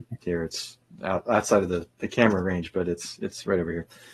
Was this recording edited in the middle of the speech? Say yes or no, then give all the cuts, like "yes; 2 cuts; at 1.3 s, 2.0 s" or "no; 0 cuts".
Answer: no; 0 cuts